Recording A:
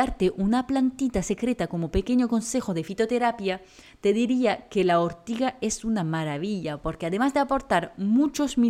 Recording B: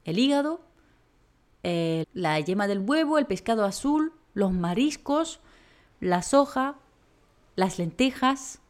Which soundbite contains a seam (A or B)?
B